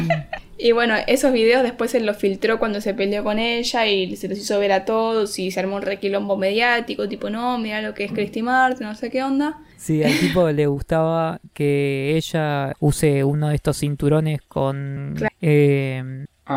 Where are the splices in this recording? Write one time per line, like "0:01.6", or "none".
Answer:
0:09.7
0:12.7
0:15.3